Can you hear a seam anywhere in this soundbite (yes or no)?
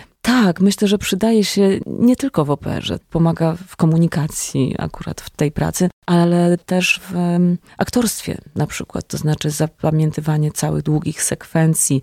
no